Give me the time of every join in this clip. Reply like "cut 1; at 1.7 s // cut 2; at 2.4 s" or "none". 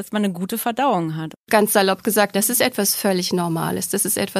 cut 1; at 2.3 s